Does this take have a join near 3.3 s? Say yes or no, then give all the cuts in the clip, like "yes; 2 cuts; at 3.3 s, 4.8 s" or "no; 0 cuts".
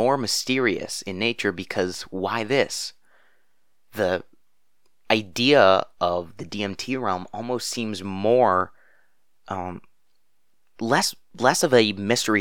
no; 0 cuts